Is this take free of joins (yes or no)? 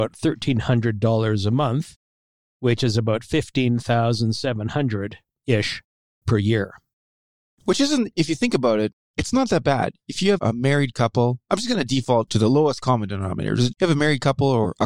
no